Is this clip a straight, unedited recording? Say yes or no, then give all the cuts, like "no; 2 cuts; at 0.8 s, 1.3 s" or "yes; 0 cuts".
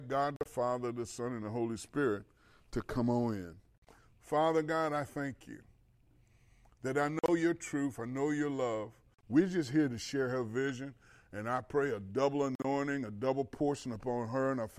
no; 1 cut; at 9.1 s